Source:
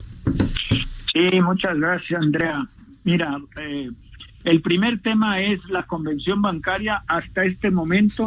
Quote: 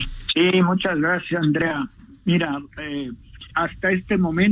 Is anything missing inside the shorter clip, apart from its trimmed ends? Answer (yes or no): yes